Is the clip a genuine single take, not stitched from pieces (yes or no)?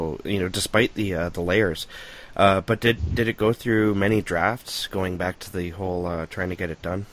yes